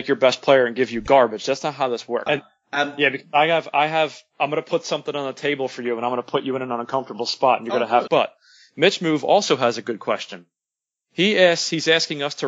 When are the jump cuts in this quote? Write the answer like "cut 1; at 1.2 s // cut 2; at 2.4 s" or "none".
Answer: cut 1; at 2.3 s // cut 2; at 8.1 s